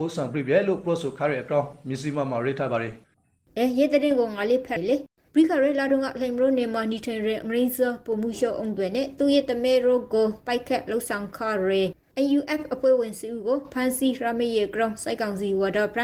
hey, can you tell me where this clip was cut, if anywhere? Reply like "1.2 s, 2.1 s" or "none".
4.8 s